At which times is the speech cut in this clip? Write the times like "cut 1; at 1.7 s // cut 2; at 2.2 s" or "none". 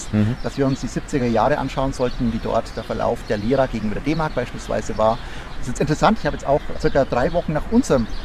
cut 1; at 5.5 s // cut 2; at 6.7 s